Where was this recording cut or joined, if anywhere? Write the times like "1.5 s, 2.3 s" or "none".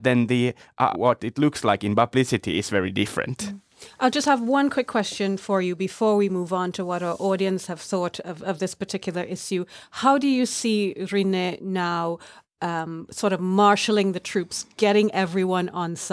0.9 s